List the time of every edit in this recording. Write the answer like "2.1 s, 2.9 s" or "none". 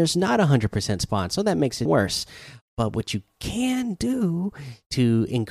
1.9 s